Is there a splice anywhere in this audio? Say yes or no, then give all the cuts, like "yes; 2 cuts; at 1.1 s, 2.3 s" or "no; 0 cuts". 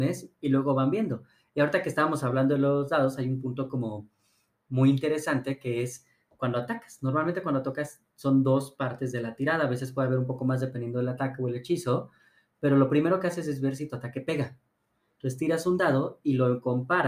no; 0 cuts